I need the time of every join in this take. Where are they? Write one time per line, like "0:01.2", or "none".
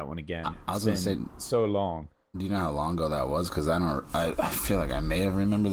none